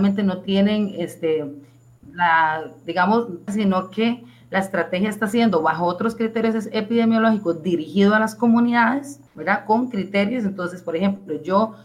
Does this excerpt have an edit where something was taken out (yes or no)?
yes